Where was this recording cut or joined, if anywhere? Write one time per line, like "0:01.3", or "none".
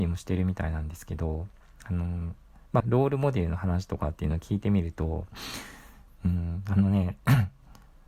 0:02.8
0:06.1